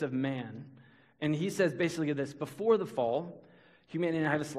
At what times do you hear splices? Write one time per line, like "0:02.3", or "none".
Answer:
none

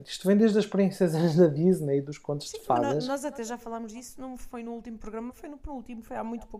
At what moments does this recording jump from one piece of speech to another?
none

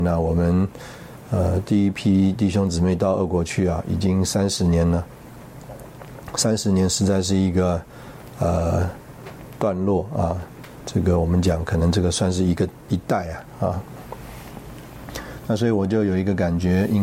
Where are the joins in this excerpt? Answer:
none

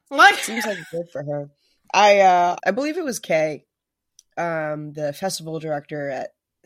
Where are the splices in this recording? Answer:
0:02.6

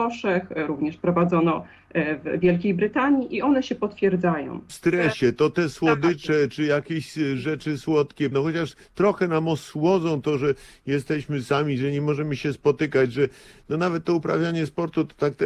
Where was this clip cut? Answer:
0:04.7
0:08.3

